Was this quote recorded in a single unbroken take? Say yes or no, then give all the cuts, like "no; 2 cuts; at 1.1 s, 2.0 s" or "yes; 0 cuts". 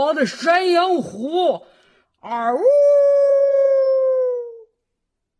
no; 1 cut; at 2.0 s